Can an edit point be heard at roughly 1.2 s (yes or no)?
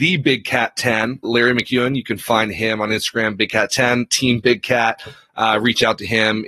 yes